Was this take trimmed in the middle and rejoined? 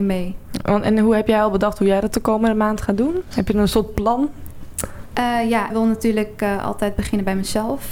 yes; 1 cut; at 5.7 s

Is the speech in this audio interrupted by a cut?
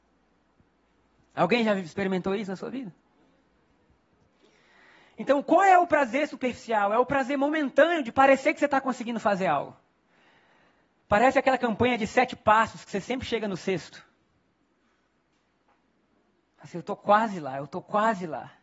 no; 0 cuts

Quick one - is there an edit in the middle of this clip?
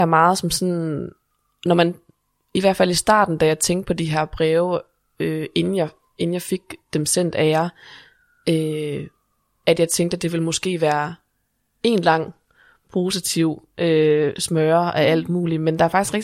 no; 0 cuts

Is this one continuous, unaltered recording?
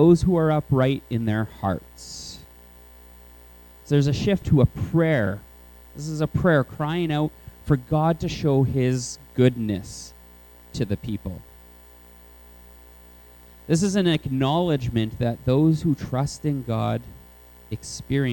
no; 1 cut; at 4.4 s

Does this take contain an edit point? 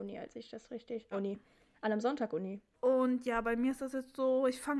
yes; 2 cuts; at 1.1 s, 2.7 s

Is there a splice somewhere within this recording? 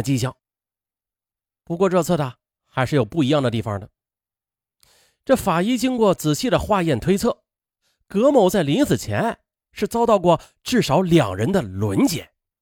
no; 0 cuts

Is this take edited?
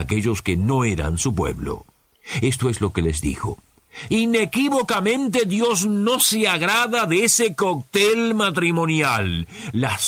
yes; 1 cut; at 4.1 s

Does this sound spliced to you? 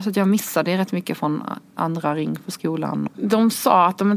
yes; 1 cut; at 3.1 s

